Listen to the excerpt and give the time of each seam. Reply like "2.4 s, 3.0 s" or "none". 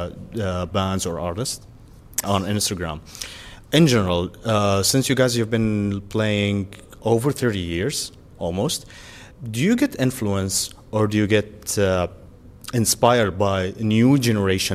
2.2 s, 3.7 s, 9.3 s